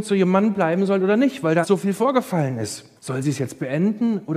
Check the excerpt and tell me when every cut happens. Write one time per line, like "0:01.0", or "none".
0:01.6
0:03.0